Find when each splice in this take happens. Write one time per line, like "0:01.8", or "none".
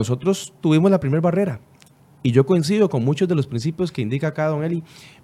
none